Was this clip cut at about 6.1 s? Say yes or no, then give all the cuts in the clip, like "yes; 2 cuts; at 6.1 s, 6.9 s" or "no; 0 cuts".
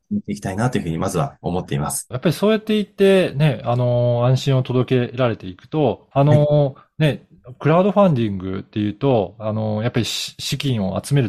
yes; 2 cuts; at 2.1 s, 6.1 s